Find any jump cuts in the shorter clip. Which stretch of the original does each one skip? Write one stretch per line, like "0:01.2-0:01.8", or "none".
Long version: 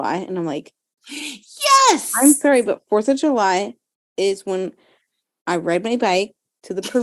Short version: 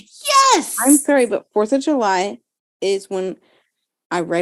none